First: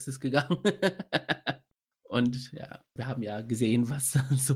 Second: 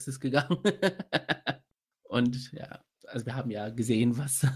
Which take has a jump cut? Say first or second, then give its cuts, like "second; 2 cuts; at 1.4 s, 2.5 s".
first; 1 cut; at 3.0 s